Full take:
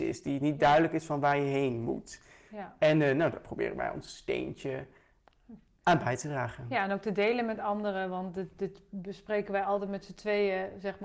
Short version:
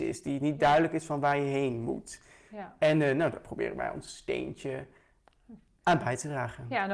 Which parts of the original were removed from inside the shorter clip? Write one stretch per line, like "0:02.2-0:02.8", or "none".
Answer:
none

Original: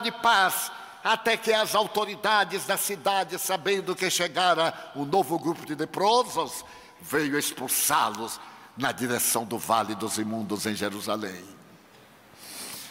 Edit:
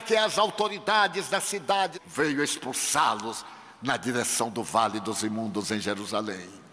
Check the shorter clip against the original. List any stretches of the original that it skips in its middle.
0:03.3-0:06.9

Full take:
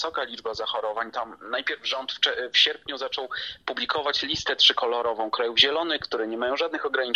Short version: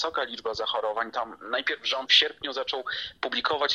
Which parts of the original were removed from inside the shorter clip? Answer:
0:02.1-0:02.5

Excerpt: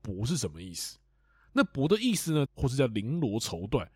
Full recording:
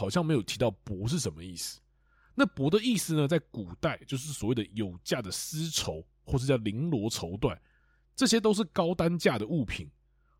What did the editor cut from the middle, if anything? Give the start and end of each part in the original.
0:03.3-0:06.2

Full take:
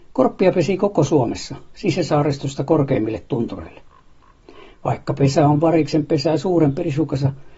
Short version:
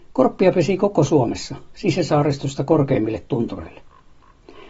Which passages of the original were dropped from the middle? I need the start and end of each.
none

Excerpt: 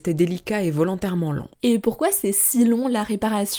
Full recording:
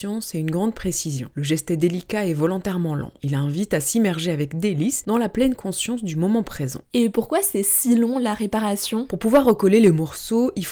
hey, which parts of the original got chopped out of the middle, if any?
0:03.2-0:06.8

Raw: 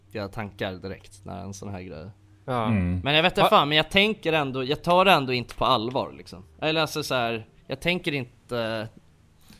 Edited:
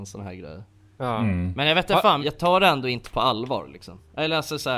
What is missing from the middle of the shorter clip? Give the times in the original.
0:03.7-0:04.6

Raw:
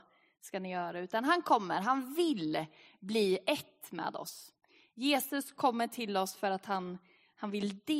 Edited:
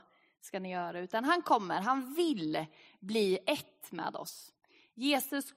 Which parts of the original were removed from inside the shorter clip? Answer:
none

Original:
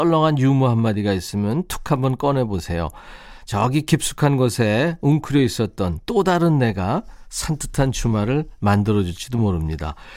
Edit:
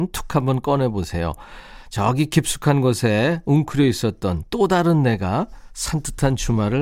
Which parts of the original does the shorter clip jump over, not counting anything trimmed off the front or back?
none

